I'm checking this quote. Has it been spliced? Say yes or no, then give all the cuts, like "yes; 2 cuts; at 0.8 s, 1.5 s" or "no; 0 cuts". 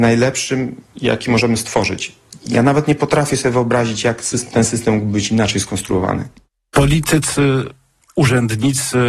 no; 0 cuts